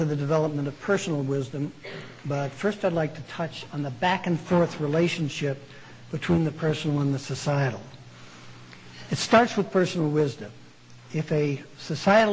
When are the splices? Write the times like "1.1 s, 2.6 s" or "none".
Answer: none